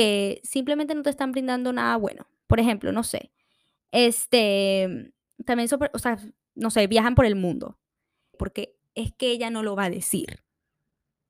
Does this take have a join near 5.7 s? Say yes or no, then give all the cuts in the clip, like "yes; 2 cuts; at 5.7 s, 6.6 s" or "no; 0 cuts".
no; 1 cut; at 8.3 s